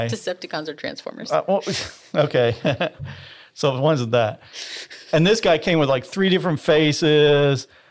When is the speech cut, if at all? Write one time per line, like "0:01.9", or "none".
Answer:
none